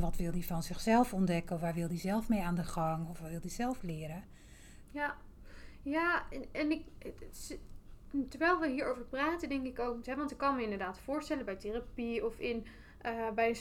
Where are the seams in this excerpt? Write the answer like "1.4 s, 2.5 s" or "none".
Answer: 4.8 s, 10.0 s